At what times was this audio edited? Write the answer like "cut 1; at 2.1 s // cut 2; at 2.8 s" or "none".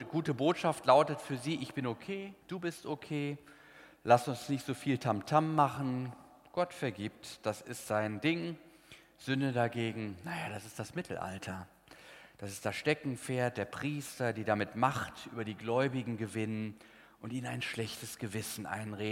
cut 1; at 2.4 s